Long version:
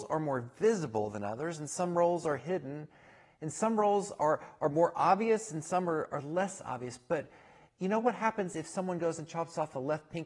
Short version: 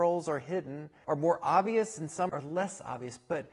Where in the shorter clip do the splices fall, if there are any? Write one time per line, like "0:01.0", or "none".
0:01.0
0:02.3